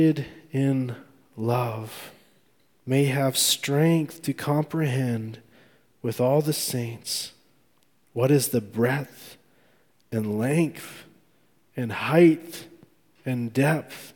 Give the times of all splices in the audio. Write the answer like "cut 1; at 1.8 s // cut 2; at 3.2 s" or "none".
none

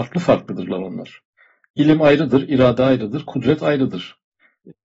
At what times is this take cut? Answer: none

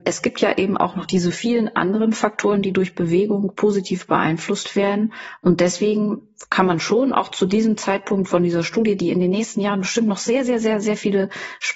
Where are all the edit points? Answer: none

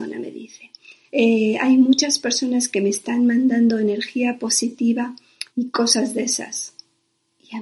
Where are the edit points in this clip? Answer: cut 1; at 1.1 s // cut 2; at 5.5 s

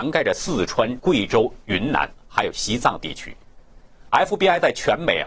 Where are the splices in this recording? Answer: cut 1; at 1.0 s // cut 2; at 4.1 s

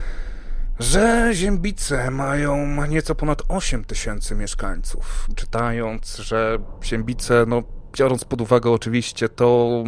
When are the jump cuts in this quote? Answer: cut 1; at 5.3 s

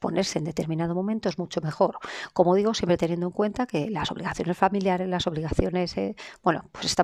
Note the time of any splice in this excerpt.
none

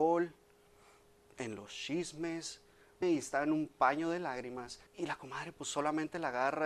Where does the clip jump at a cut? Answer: cut 1; at 3.0 s // cut 2; at 4.9 s

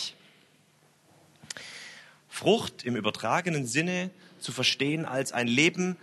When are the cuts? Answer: cut 1; at 2.2 s

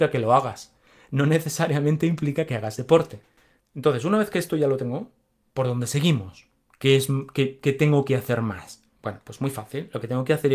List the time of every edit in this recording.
cut 1; at 3.6 s

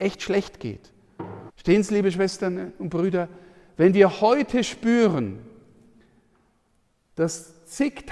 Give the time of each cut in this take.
cut 1; at 1.5 s

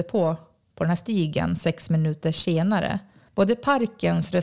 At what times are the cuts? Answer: cut 1; at 3.3 s

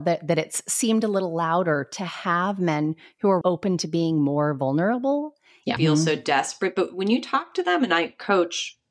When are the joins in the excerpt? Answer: cut 1; at 3.4 s // cut 2; at 5.8 s

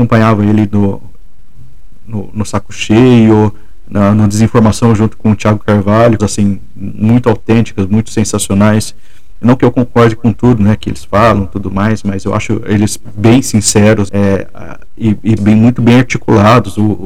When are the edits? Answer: cut 1; at 6.2 s // cut 2; at 14.1 s // cut 3; at 15.4 s

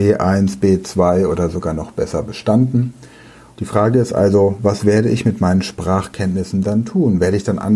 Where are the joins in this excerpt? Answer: cut 1; at 3.6 s

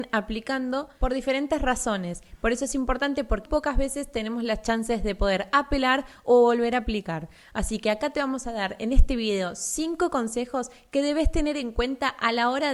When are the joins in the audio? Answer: cut 1; at 3.5 s

